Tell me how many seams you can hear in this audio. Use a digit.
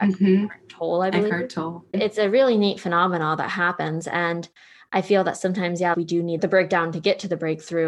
2